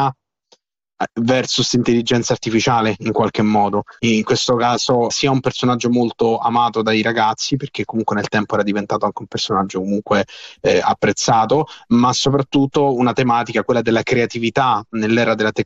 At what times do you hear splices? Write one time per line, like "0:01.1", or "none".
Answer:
0:04.0
0:05.1